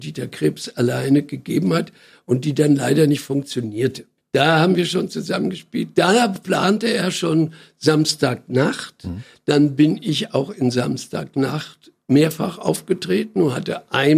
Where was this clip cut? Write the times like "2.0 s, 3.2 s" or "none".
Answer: none